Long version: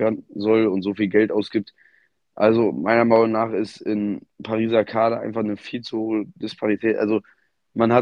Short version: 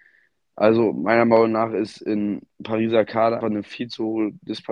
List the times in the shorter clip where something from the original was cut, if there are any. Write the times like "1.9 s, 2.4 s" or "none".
3.4 s